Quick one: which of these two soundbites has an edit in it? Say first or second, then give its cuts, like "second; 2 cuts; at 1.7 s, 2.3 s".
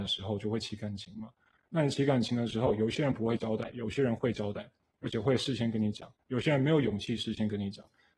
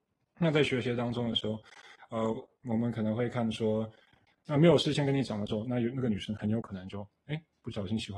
second; 1 cut; at 4.3 s